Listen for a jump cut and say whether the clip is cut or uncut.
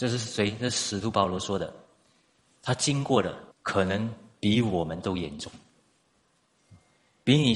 cut